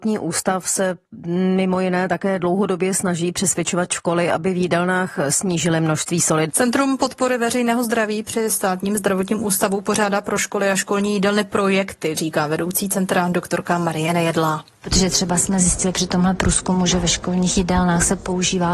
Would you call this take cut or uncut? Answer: cut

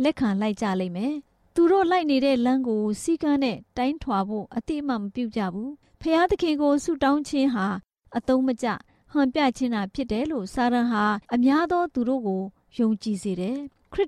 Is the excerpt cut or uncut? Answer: cut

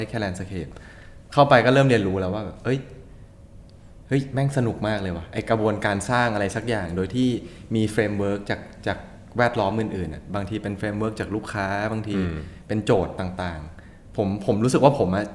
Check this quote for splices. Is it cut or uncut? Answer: uncut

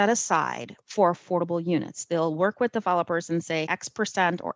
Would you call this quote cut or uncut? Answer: cut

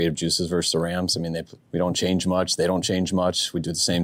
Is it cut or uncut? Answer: cut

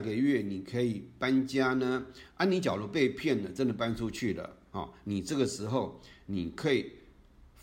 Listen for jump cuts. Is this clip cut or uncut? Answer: cut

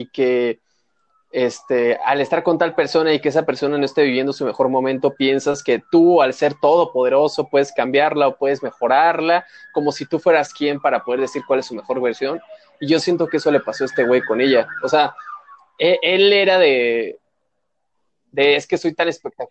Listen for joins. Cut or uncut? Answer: uncut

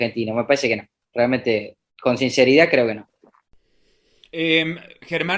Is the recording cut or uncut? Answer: uncut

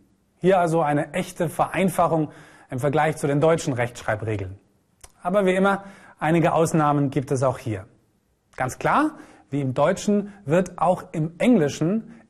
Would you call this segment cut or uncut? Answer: uncut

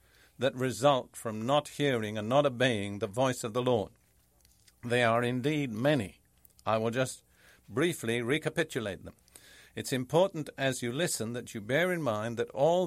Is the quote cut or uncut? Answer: uncut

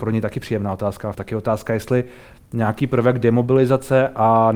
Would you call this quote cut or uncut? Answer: cut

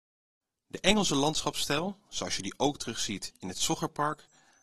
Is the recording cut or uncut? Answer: uncut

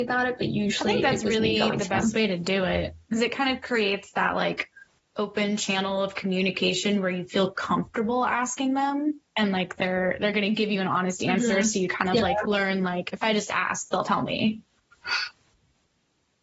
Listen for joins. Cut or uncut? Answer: cut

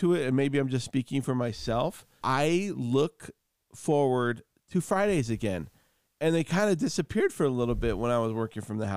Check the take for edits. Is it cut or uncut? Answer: cut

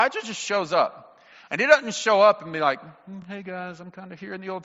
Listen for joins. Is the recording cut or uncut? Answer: uncut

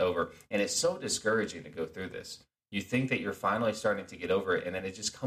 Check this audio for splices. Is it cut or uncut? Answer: uncut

